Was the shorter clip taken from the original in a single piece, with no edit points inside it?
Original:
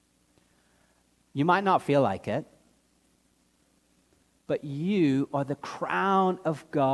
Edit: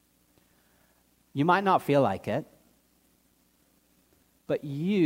yes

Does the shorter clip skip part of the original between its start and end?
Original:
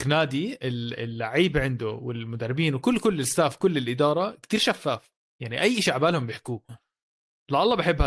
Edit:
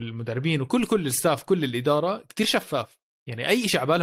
no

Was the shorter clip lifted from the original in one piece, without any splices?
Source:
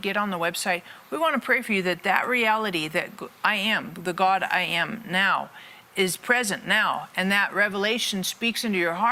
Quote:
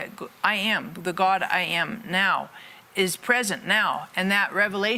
yes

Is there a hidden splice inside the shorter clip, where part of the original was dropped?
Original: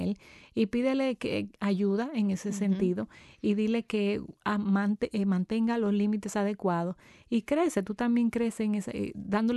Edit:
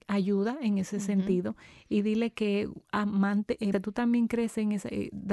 yes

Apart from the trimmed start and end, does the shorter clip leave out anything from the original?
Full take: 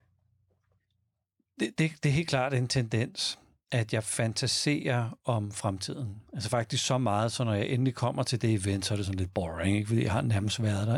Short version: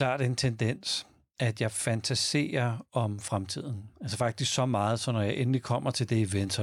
no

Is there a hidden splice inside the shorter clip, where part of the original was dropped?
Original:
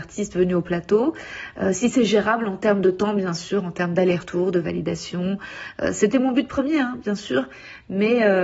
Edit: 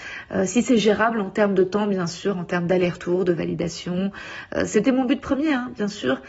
no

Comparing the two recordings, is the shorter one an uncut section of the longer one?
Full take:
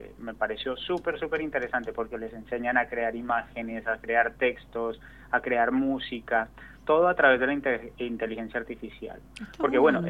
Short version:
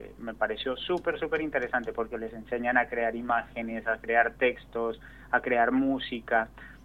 yes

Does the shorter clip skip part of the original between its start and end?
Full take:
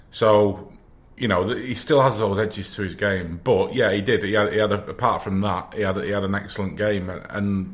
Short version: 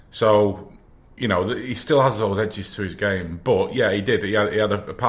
no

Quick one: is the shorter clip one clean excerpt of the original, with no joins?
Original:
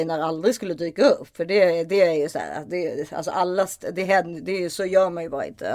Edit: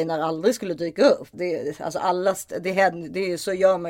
no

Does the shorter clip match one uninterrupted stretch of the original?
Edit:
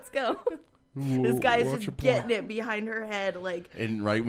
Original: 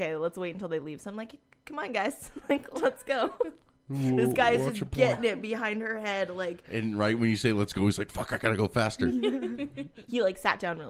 yes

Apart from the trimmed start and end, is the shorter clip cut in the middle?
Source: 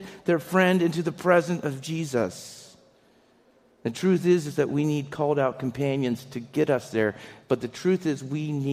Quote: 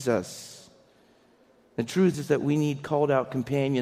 yes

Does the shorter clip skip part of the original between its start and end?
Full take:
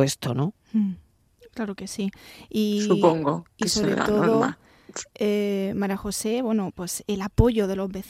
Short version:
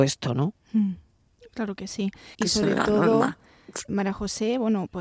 yes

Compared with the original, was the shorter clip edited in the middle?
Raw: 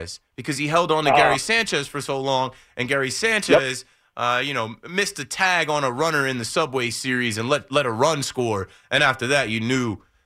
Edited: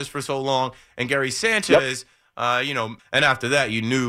yes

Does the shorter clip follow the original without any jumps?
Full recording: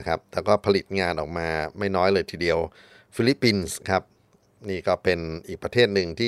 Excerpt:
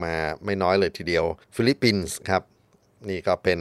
no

